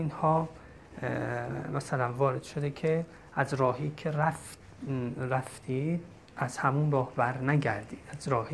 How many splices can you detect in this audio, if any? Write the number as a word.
one